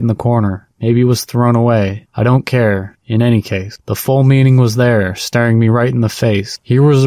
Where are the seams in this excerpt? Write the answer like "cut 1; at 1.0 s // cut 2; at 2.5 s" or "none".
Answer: none